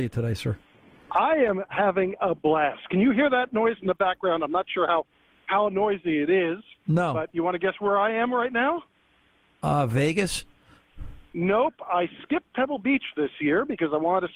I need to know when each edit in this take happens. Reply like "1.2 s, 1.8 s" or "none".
none

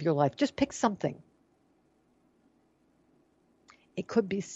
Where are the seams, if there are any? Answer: none

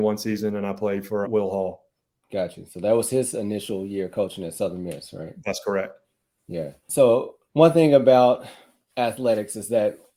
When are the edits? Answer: 1.2 s

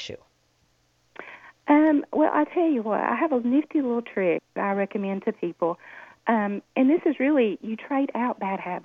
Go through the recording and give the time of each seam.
none

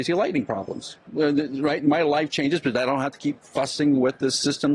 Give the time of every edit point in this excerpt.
1.1 s

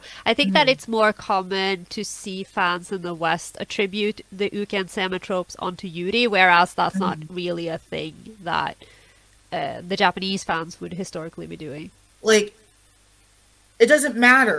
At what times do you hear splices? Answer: 12.1 s

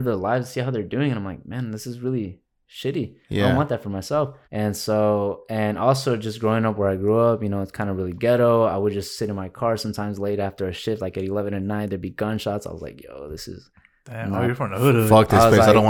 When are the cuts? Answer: 4.4 s

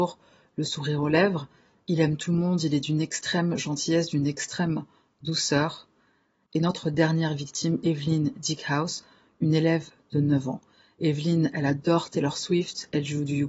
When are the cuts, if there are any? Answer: none

